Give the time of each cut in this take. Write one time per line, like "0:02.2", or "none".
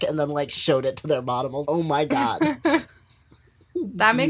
0:01.6